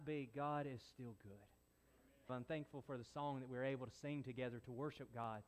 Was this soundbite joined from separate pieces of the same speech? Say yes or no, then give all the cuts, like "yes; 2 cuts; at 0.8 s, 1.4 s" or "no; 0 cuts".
yes; 1 cut; at 2.3 s